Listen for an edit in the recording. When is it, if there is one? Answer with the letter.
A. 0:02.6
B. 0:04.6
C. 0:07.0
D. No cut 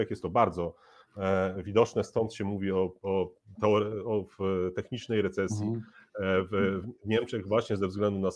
D